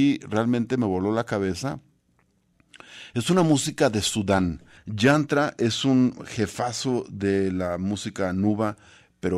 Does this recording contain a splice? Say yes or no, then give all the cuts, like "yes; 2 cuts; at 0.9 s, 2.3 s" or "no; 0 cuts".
yes; 1 cut; at 4.8 s